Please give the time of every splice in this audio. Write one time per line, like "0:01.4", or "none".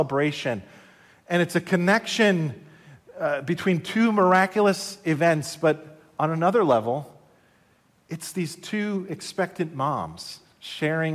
none